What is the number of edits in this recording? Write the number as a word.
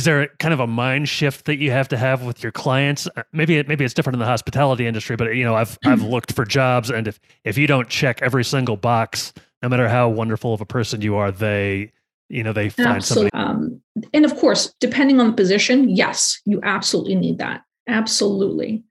three